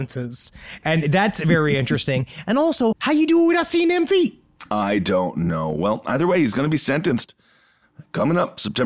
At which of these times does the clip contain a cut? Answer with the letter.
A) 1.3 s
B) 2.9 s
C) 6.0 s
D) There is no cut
B